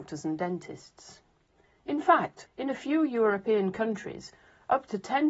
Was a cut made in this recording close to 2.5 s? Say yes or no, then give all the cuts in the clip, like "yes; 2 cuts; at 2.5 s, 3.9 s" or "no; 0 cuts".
yes; 1 cut; at 2.5 s